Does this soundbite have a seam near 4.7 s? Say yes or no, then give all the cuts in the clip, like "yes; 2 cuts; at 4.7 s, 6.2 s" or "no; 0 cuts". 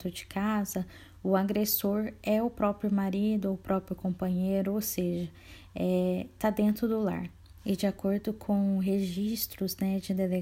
no; 1 cut; at 7.6 s